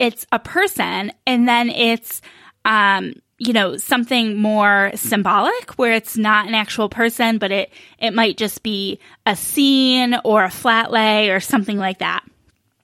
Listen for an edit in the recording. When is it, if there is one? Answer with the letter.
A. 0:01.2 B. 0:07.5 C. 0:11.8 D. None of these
D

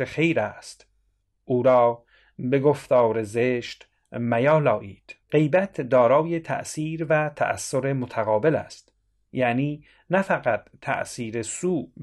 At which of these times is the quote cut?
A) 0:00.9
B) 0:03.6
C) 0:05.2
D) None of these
C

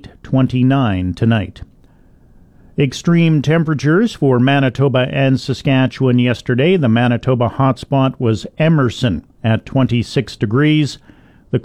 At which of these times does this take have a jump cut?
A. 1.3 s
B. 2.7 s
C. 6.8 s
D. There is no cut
D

